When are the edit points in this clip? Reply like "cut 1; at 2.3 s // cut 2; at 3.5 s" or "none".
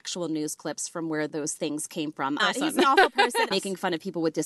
cut 1; at 2.4 s // cut 2; at 3.5 s